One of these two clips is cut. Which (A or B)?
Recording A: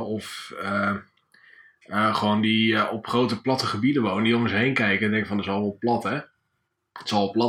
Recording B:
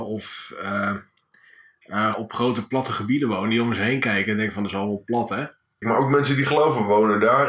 B